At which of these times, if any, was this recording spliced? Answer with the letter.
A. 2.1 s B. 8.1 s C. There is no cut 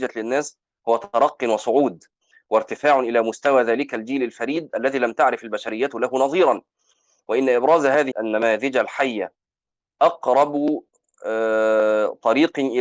B